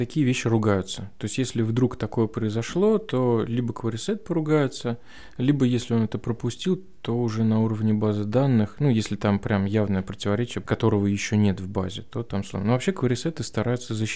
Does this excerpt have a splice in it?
yes; 1 cut; at 10.6 s

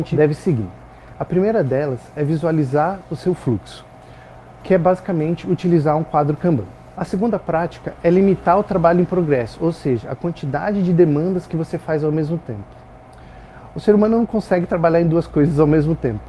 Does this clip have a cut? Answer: no; 0 cuts

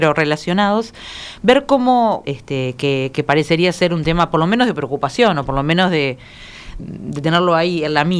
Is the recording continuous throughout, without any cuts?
no; 2 cuts; at 2.2 s, 6.8 s

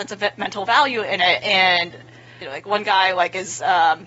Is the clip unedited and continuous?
no; 1 cut; at 2.4 s

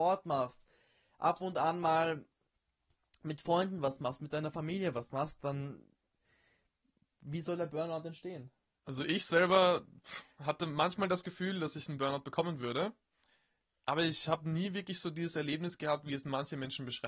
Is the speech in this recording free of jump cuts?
no; 1 cut; at 8.7 s

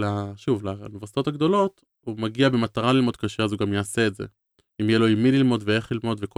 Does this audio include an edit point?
no; 0 cuts

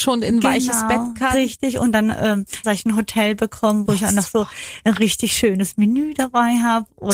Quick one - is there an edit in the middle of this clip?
yes; 2 cuts; at 2.6 s, 3.9 s

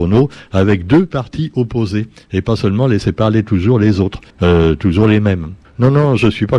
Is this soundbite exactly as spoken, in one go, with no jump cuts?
no; 2 cuts; at 4.3 s, 5.6 s

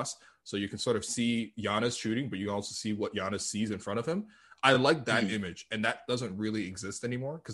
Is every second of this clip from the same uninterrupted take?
yes; 0 cuts

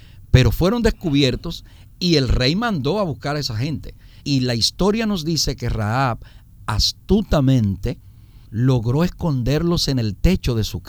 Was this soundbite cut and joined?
yes; 2 cuts; at 4.2 s, 8.4 s

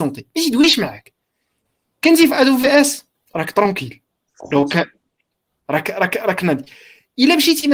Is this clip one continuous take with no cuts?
yes; 0 cuts

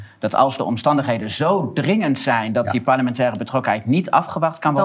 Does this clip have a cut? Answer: no; 0 cuts

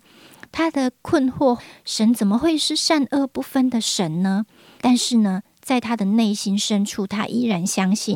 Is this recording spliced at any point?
yes; 2 cuts; at 1.6 s, 4.8 s

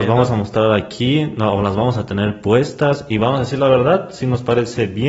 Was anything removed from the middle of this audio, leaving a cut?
no; 0 cuts

